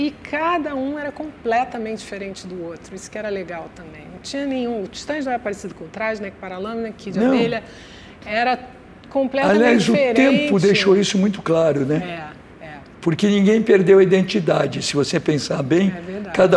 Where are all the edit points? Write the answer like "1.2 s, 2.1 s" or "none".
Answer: none